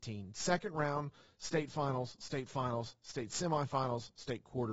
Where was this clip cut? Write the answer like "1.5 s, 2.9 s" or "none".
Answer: none